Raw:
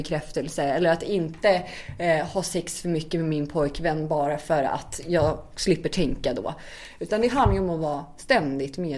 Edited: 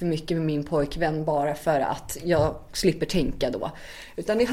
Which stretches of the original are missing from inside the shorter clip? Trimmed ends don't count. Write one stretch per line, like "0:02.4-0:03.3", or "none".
none